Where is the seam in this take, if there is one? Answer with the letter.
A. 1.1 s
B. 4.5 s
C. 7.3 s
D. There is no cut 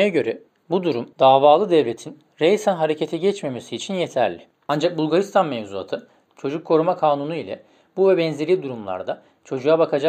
A